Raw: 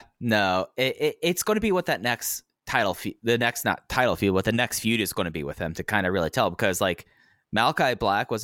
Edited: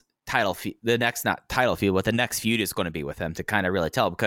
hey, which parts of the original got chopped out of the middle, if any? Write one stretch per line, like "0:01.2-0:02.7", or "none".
none